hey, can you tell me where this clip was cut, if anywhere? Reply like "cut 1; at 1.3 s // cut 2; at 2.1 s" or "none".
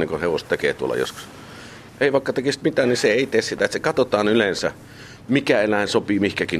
cut 1; at 1.9 s